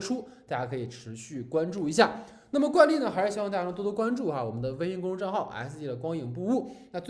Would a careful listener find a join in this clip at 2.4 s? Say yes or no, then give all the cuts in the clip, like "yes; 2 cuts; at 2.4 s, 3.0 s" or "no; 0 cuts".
no; 0 cuts